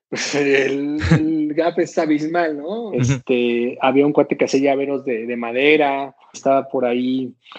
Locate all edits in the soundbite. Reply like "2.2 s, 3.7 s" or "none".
2.9 s, 6.3 s

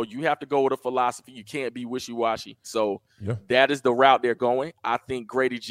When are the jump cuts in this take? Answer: 2.6 s

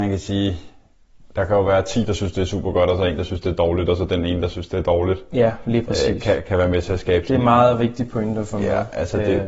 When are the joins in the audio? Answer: none

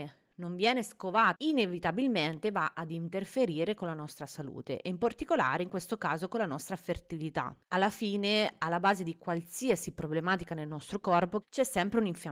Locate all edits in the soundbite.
1.3 s, 7.6 s, 11.4 s

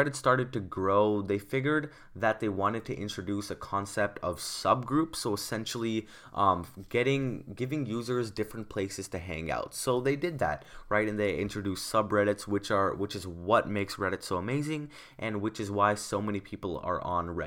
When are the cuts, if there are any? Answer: none

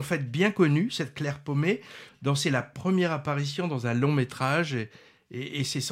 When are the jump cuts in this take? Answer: 2.1 s

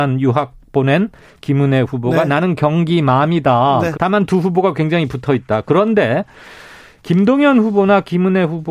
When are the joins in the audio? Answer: 3.9 s

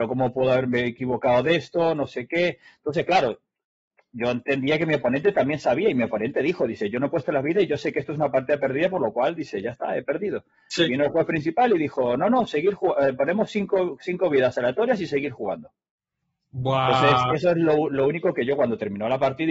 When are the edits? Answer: none

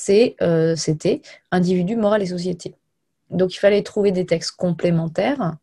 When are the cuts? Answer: none

